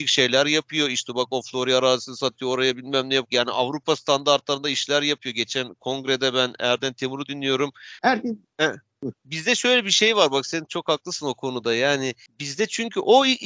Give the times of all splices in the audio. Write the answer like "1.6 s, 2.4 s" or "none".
3.3 s, 8.0 s